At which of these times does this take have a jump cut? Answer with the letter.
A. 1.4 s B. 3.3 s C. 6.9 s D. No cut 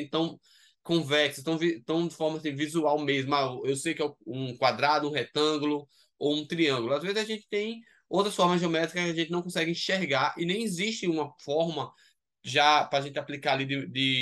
D